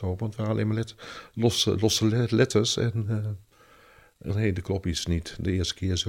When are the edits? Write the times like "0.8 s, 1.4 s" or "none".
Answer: 4.3 s